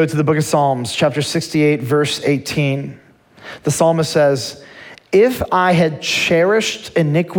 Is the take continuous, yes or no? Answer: yes